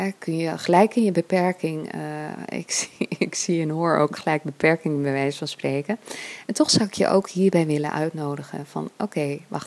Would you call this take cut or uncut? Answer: uncut